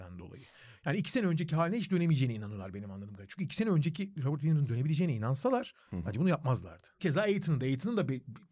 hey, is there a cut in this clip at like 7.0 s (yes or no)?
yes